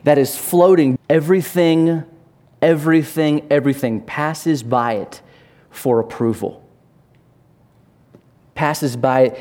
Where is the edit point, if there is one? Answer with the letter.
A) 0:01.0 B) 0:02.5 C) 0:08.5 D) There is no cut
A